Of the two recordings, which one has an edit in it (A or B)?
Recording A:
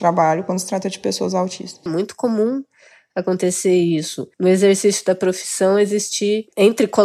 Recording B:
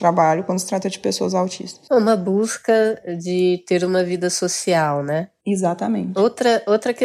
A